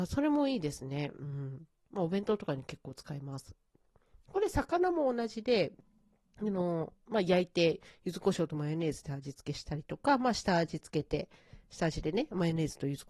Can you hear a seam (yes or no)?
no